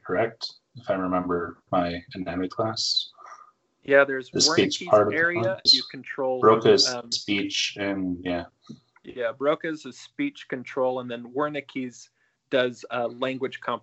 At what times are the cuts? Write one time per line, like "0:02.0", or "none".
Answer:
0:05.7